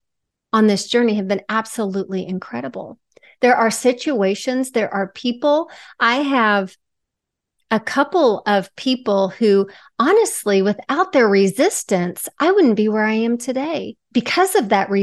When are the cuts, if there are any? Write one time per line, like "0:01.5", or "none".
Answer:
none